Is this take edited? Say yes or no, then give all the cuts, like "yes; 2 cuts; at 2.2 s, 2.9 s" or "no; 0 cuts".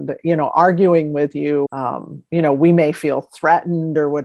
yes; 1 cut; at 1.7 s